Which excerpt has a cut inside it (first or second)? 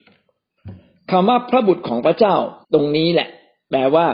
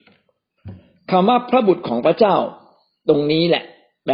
first